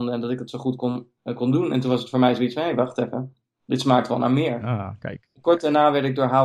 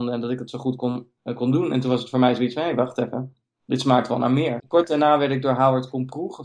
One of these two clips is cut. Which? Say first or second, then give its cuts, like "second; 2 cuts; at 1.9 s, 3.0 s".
second; 1 cut; at 4.6 s